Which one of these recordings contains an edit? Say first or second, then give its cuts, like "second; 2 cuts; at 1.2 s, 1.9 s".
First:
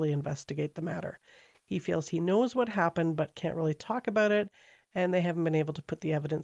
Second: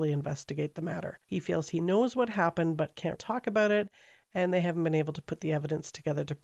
second; 2 cuts; at 1.2 s, 3.1 s